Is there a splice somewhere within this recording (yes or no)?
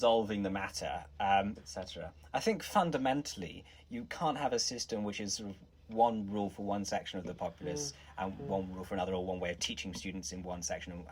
yes